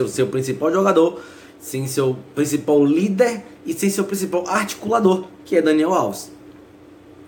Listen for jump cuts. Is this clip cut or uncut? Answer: uncut